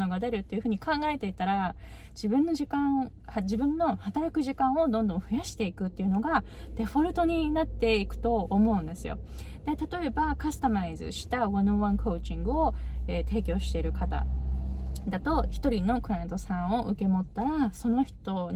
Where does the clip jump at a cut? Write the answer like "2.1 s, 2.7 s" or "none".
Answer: none